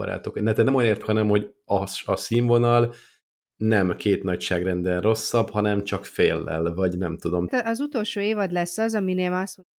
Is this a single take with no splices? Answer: no; 2 cuts; at 1.0 s, 7.5 s

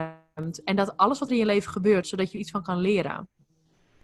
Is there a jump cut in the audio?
yes; 1 cut; at 2.0 s

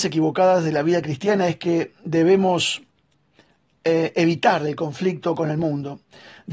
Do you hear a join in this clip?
no; 0 cuts

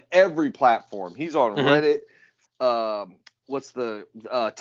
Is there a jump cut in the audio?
yes; 1 cut; at 2.4 s

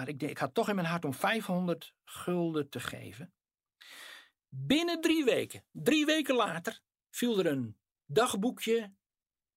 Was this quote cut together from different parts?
no; 0 cuts

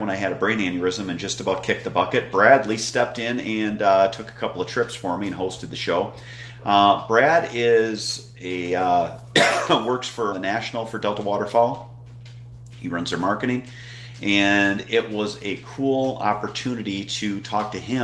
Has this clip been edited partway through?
yes; 1 cut; at 10.3 s

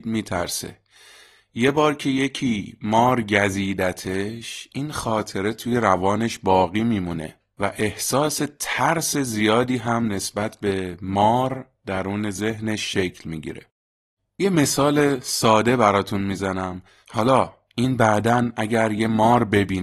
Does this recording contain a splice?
yes; 2 cuts; at 14.2 s, 17.0 s

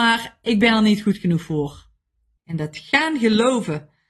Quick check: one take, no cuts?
no; 1 cut; at 2.4 s

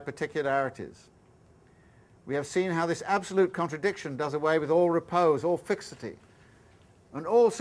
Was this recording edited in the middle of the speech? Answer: no; 0 cuts

